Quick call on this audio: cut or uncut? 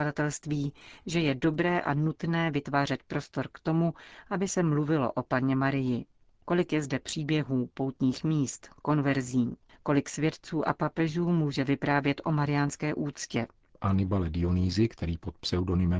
cut